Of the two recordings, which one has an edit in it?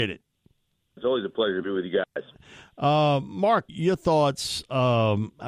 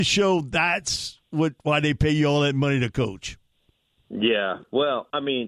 first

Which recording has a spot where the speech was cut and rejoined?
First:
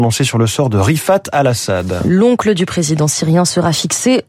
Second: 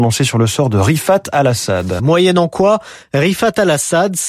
second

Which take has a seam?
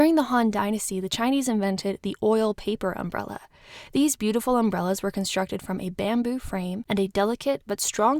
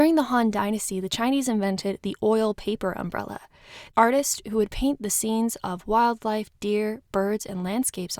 second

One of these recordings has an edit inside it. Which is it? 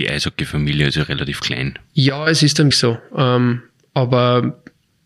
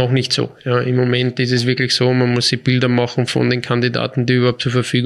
first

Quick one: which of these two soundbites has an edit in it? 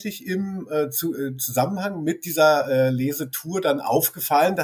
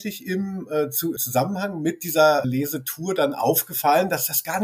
second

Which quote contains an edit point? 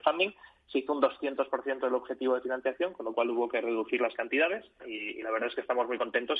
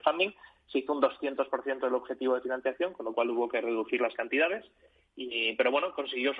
first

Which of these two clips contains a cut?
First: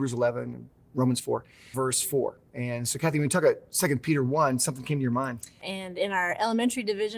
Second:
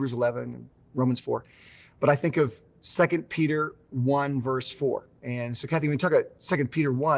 first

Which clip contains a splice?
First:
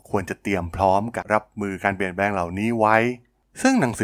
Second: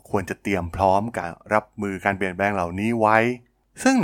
first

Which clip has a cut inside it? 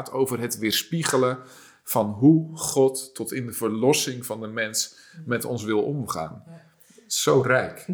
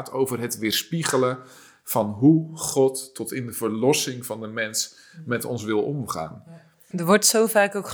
second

